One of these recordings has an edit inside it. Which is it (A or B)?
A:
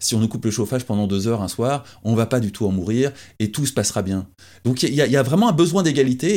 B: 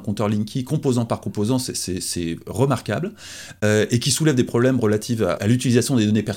B